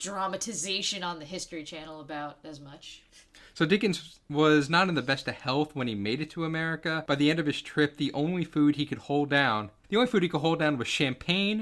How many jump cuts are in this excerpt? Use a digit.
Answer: 1